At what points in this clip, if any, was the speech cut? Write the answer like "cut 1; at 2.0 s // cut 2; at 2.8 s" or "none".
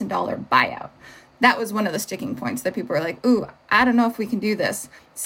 none